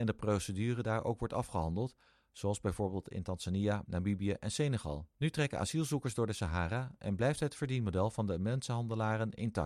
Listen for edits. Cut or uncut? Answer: cut